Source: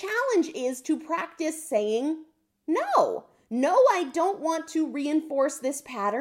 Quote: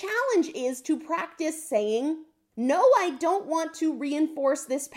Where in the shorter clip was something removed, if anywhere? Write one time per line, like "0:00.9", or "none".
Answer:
0:02.5